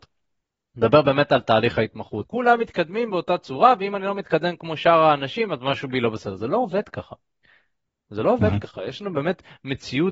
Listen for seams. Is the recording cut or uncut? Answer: cut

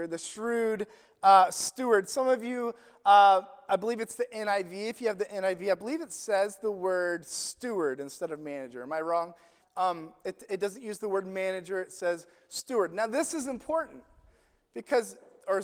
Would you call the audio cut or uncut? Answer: cut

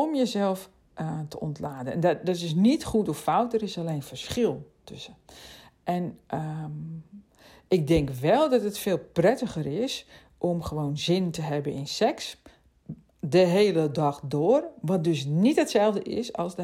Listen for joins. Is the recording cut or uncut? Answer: uncut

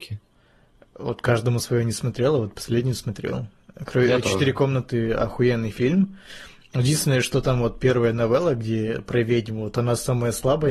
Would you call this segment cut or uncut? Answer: uncut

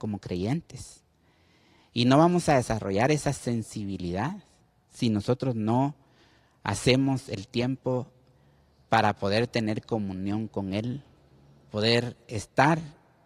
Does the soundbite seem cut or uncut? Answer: uncut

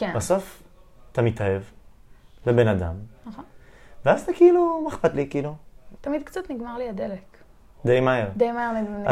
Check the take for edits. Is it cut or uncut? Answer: cut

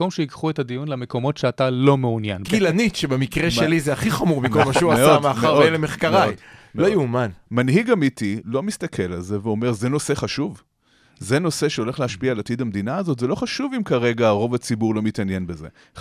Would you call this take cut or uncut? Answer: cut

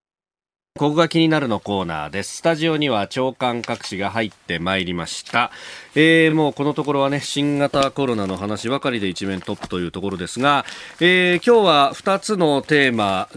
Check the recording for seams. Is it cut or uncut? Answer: uncut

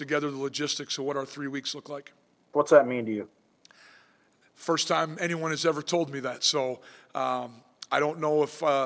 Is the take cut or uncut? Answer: cut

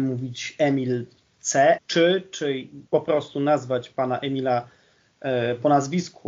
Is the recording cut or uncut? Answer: cut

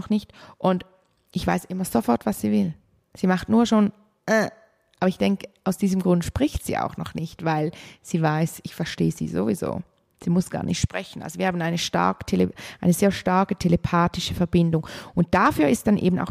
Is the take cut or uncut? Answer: uncut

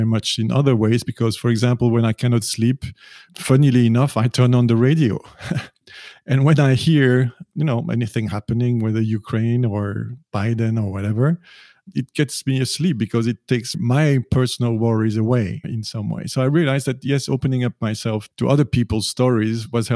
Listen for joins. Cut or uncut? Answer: uncut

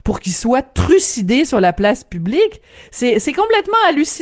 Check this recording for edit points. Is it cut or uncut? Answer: uncut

